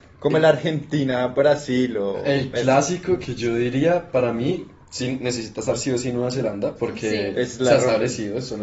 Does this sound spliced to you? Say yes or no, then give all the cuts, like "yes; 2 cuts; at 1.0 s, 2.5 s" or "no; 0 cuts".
yes; 1 cut; at 6.8 s